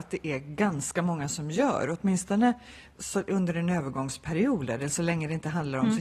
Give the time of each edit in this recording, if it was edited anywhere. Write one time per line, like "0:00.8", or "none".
none